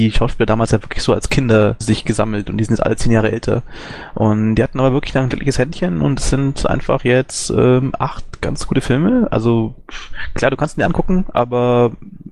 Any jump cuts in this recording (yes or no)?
no